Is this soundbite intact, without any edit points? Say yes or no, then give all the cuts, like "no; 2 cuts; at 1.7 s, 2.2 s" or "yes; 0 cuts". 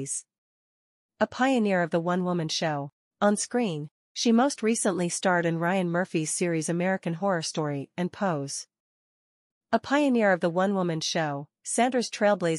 no; 2 cuts; at 3.0 s, 9.5 s